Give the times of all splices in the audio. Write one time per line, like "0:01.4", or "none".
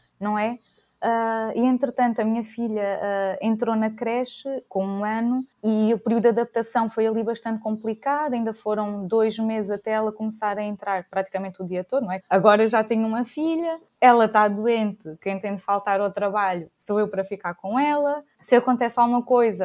0:12.2